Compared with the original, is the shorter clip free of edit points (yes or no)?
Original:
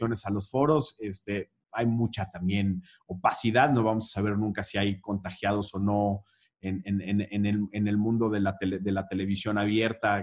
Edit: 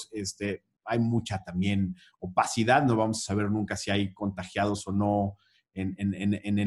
yes